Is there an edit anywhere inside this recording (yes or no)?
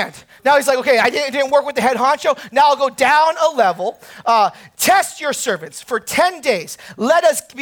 no